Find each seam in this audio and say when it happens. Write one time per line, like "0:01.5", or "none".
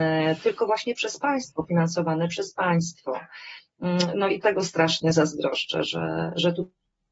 0:04.4
0:05.8

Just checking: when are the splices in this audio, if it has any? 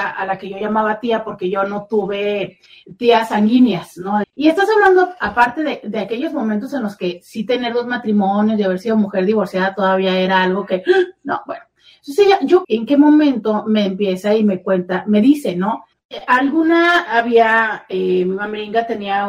0:04.2
0:12.6
0:15.9

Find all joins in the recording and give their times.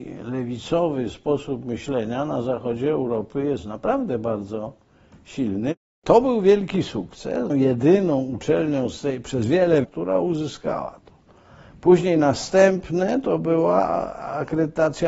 0:07.5
0:09.8

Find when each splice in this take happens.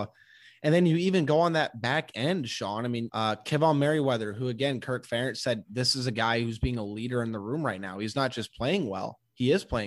0:03.1

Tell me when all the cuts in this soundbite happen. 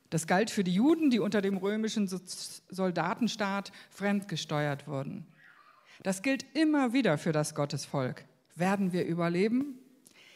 none

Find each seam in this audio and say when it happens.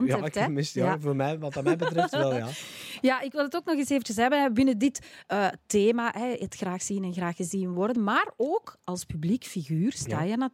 none

